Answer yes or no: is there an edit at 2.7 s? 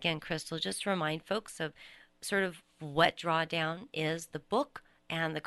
yes